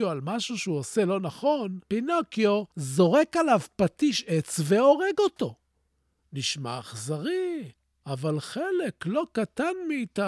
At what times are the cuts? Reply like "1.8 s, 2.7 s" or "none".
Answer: none